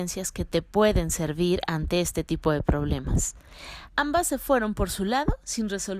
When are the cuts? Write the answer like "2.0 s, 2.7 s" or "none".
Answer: 3.9 s